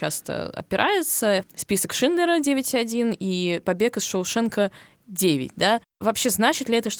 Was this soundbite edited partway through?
yes; 1 cut; at 1.4 s

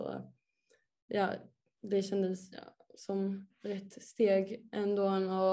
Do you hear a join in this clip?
no; 0 cuts

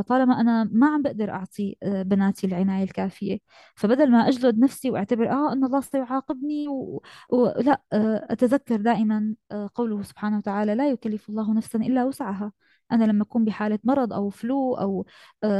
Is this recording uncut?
yes; 0 cuts

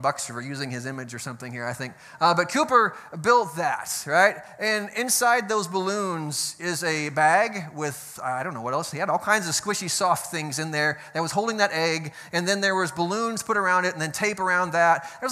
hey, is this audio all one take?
yes; 0 cuts

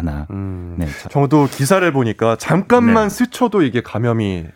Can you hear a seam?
no; 0 cuts

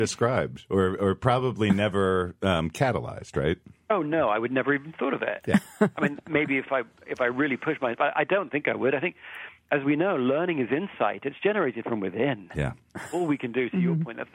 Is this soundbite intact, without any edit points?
yes; 0 cuts

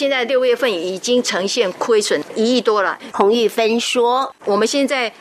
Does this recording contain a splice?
yes; 1 cut; at 3.1 s

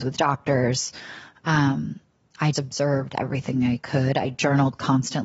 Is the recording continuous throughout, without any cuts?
no; 1 cut; at 2.5 s

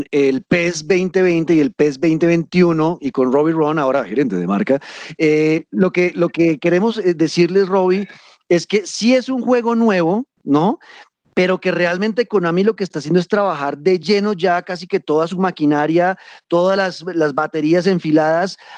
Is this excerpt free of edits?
yes; 0 cuts

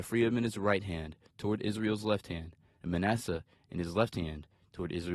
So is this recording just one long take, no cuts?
yes; 0 cuts

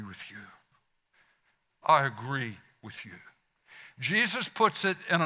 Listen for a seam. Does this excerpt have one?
no; 0 cuts

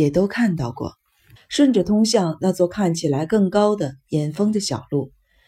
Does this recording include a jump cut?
yes; 1 cut; at 1.4 s

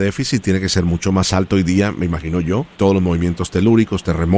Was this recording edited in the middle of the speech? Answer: yes; 1 cut; at 2.8 s

